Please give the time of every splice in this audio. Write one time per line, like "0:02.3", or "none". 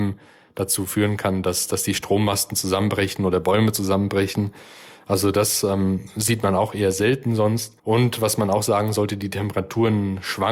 0:07.8